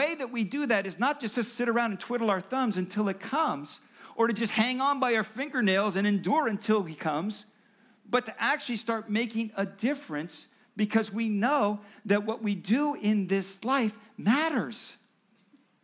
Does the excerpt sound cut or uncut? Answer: uncut